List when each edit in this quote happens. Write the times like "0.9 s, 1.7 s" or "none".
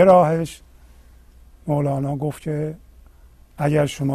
none